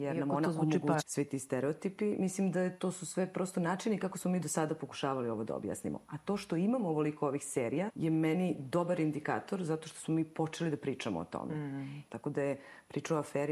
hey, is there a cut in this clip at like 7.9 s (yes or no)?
yes